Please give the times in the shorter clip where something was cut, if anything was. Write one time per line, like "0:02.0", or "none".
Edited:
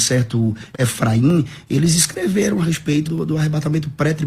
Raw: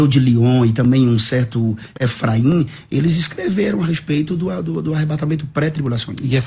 0:03.1